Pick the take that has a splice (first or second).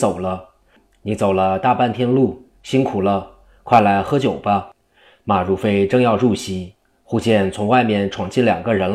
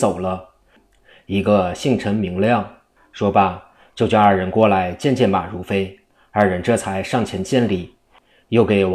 second